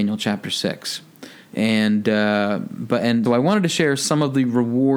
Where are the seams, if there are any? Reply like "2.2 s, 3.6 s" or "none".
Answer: 3.3 s